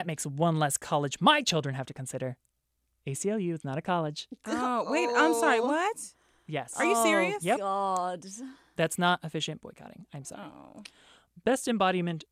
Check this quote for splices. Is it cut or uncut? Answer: uncut